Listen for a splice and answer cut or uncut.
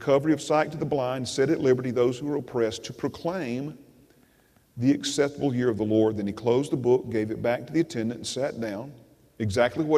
uncut